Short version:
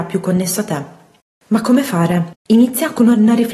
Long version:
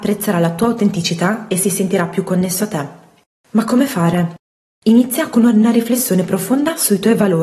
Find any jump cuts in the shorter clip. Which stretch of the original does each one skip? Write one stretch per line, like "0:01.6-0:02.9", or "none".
0:04.4-0:04.7